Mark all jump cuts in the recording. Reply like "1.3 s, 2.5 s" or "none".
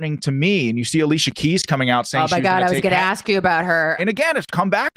4.0 s